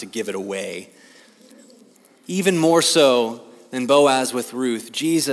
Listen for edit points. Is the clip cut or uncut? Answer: uncut